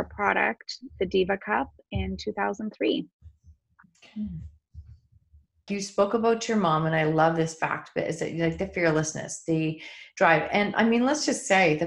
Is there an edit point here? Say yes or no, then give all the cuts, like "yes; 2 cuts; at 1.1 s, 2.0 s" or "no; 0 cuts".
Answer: yes; 1 cut; at 5.7 s